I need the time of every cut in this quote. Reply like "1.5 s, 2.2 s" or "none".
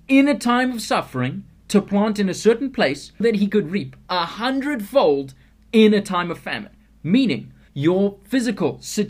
3.2 s, 7.7 s